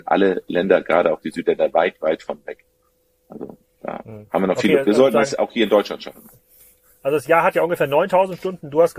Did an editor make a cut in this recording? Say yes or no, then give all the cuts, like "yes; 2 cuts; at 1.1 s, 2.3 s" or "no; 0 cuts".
no; 0 cuts